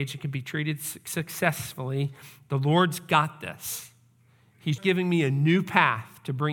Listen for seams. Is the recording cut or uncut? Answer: cut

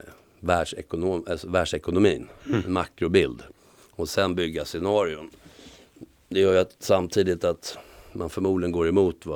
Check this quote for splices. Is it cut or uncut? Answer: uncut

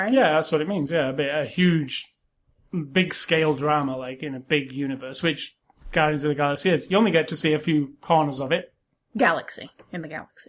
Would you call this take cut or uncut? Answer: uncut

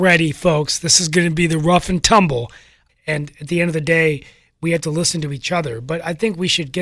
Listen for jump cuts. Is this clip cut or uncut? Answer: cut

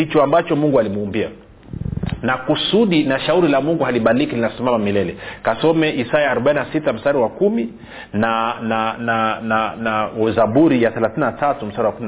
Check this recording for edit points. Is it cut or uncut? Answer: uncut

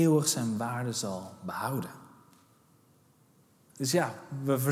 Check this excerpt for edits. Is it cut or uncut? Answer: cut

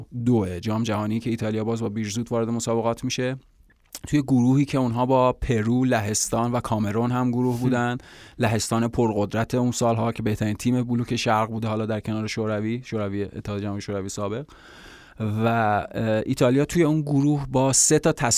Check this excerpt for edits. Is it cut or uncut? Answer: uncut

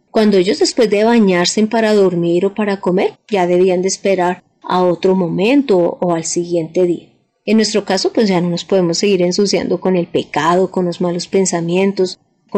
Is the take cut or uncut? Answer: cut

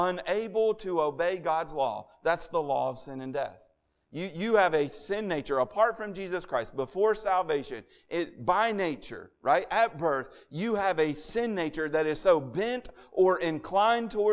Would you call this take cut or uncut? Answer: uncut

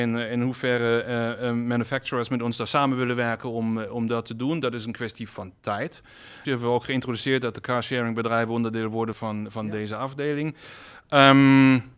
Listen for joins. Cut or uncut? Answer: cut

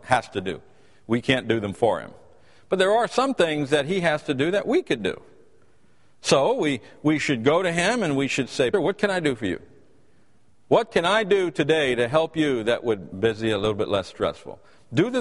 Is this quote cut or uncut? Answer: cut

